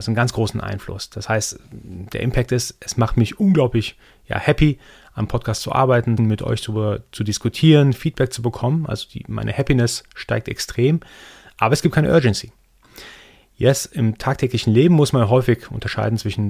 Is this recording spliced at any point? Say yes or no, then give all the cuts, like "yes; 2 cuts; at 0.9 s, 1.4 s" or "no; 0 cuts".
yes; 1 cut; at 6.2 s